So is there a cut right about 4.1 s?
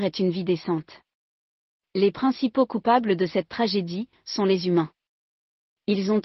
yes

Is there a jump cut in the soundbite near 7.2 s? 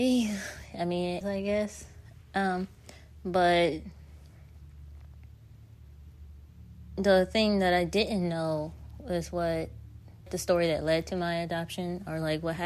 no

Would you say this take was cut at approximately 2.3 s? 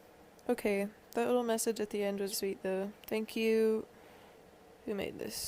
yes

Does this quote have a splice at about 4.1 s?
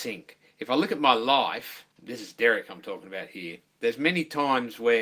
no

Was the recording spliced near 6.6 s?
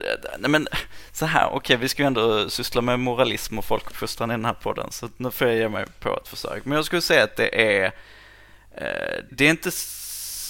no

